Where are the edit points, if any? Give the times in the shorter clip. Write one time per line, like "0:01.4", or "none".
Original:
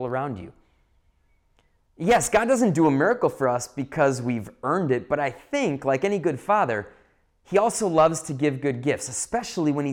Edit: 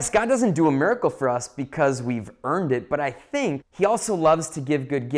0:03.6